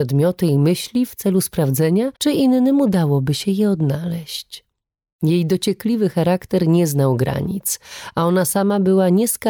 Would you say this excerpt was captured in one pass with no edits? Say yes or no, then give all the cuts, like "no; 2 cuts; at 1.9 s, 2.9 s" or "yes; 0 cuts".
no; 1 cut; at 2.2 s